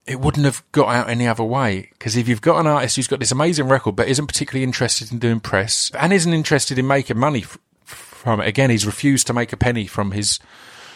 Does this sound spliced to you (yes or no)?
yes